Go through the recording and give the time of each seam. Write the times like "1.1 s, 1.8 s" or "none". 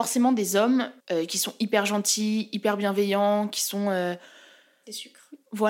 1.0 s